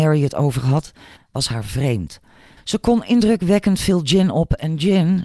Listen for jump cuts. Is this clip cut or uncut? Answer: cut